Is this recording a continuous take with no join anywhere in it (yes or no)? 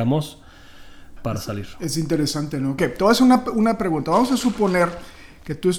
no